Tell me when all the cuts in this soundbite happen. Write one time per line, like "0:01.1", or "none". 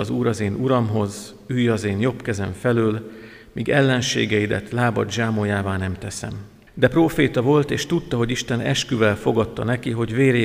0:06.7